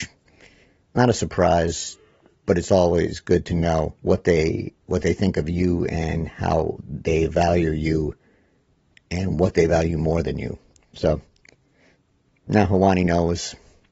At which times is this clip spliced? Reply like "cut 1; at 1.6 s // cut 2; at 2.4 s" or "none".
cut 1; at 4.0 s